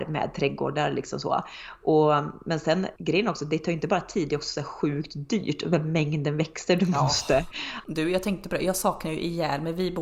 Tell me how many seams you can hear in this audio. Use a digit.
2